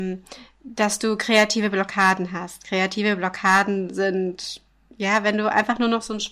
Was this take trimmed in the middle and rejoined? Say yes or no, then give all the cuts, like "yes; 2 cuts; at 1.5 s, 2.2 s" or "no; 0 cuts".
no; 0 cuts